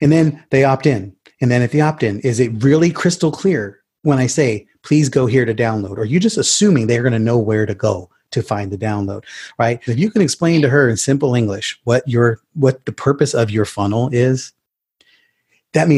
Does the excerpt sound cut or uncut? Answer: cut